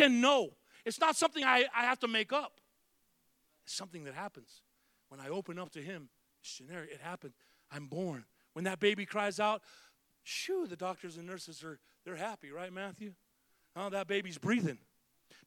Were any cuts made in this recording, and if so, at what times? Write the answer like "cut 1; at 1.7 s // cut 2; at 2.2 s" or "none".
none

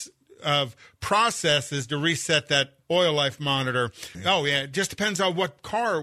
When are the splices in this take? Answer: cut 1; at 2.8 s // cut 2; at 4.1 s

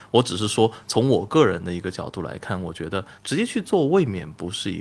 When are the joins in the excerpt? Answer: cut 1; at 3.2 s

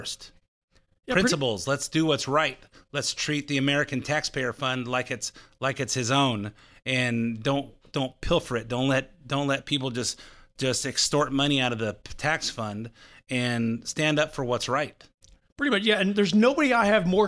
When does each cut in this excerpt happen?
none

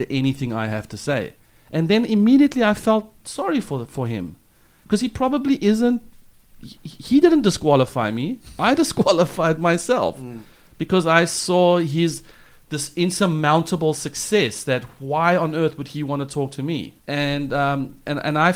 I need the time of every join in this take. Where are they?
cut 1; at 17.0 s

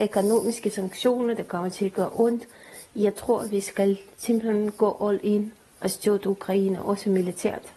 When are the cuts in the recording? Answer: none

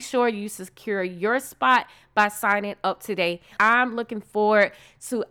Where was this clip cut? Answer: cut 1; at 3.6 s

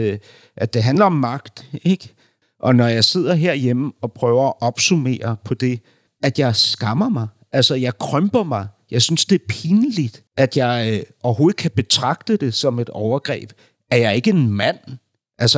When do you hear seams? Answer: cut 1; at 2.4 s // cut 2; at 6.1 s // cut 3; at 10.3 s

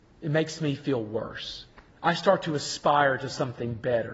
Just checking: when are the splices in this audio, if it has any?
cut 1; at 1.9 s

